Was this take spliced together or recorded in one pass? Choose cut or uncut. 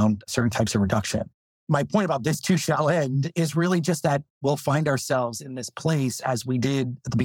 uncut